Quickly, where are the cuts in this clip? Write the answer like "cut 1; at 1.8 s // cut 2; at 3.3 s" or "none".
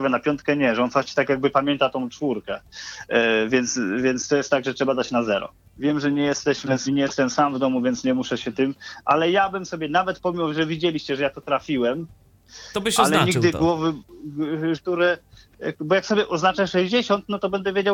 cut 1; at 5.7 s // cut 2; at 6.9 s // cut 3; at 14.7 s

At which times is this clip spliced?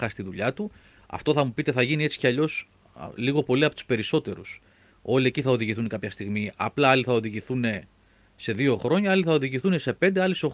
none

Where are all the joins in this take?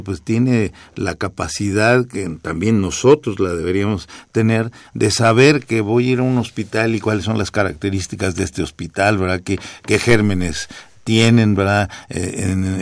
none

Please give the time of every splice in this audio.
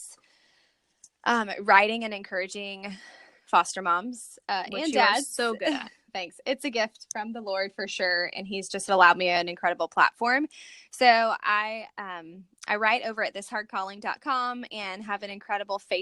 none

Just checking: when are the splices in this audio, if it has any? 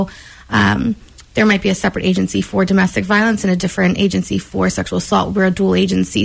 none

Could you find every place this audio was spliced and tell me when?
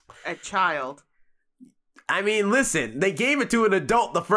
none

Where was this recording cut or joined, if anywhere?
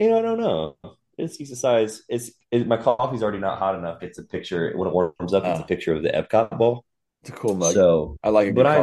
cut 1; at 4.0 s // cut 2; at 7.1 s

